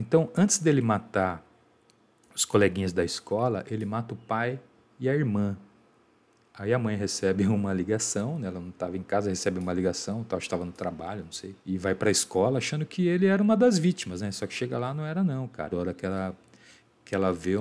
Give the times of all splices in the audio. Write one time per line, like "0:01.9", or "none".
0:11.6
0:15.7